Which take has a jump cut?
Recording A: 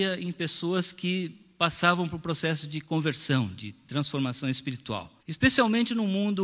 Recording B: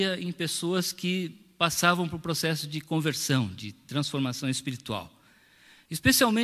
A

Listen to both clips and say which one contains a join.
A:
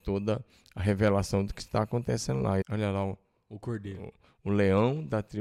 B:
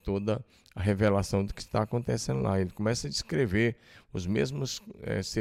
A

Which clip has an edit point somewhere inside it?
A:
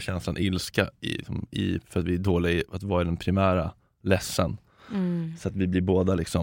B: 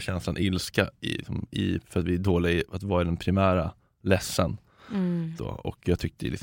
B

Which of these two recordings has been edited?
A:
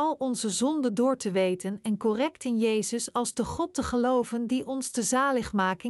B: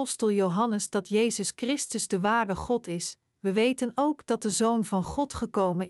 B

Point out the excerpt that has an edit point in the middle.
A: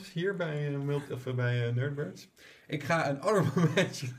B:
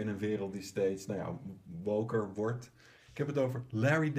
B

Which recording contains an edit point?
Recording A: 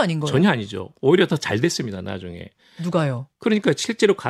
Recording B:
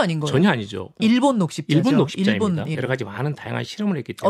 B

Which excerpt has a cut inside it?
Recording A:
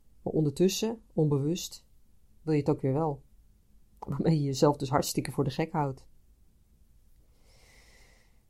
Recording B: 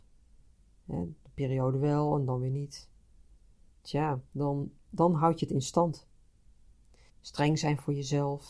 B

